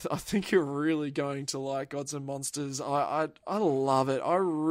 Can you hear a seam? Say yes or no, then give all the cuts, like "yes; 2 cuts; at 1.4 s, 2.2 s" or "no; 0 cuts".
no; 0 cuts